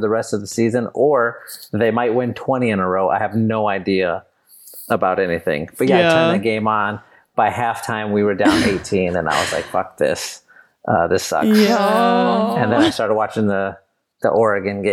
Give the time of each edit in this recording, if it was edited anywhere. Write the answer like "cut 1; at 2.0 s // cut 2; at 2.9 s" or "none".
none